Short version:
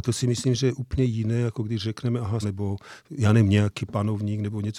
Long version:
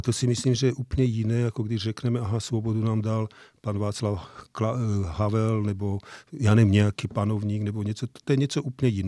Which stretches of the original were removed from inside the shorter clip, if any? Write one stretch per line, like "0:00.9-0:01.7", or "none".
0:02.4-0:05.6